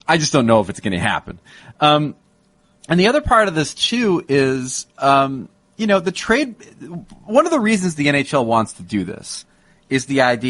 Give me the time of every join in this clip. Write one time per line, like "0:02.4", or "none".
none